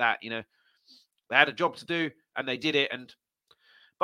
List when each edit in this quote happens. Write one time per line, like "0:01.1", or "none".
none